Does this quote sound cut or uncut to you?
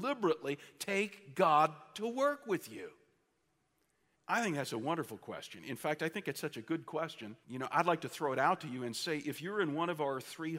cut